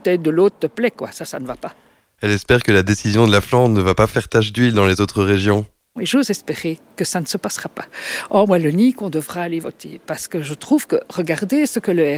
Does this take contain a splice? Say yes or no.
no